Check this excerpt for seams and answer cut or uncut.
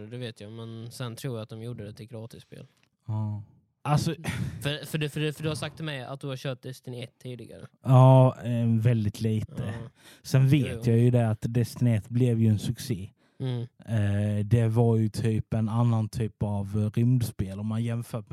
cut